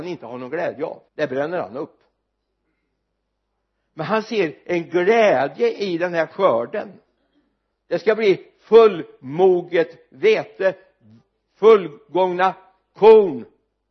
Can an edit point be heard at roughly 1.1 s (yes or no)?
yes